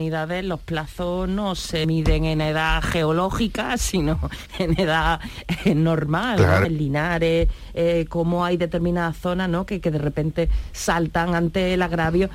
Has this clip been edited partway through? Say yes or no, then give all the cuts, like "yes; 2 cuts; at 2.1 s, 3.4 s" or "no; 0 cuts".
yes; 1 cut; at 6.6 s